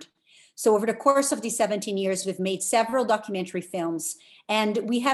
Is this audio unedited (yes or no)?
yes